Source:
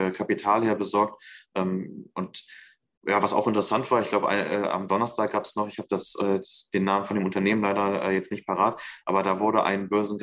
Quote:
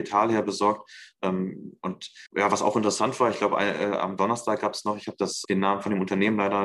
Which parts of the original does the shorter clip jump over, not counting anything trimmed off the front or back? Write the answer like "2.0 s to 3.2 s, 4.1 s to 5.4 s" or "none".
2.6 s to 3.0 s, 6.2 s to 6.7 s